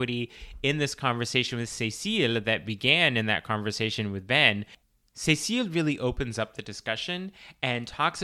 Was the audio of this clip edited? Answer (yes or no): no